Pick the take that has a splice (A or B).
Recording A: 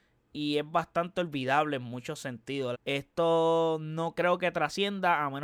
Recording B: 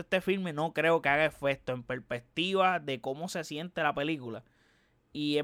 A